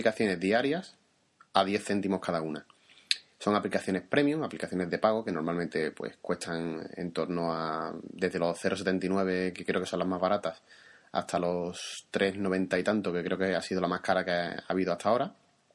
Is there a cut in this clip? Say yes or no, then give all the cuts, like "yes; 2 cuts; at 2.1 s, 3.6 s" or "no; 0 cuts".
no; 0 cuts